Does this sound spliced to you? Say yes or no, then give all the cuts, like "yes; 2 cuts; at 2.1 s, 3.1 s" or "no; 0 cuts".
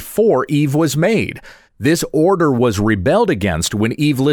yes; 1 cut; at 1.7 s